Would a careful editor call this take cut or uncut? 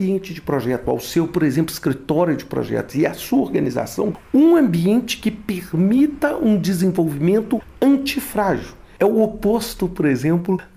uncut